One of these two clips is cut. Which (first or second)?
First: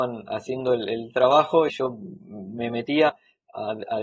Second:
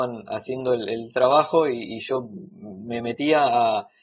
first